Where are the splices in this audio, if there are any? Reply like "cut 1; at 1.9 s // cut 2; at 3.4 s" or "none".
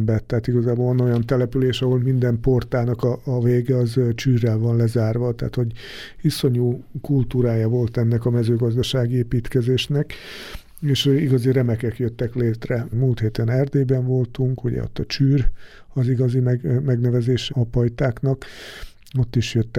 cut 1; at 12.9 s // cut 2; at 17.5 s